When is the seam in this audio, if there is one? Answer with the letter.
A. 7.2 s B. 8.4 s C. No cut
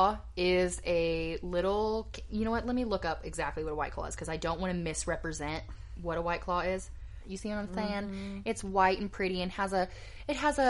A